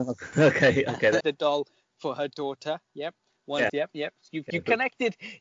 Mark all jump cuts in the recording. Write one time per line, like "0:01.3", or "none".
0:01.2
0:03.7